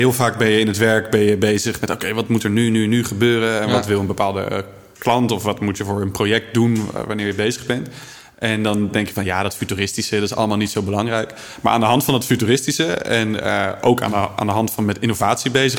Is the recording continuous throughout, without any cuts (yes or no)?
yes